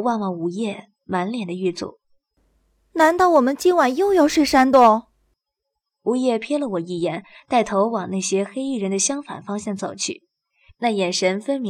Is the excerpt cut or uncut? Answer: uncut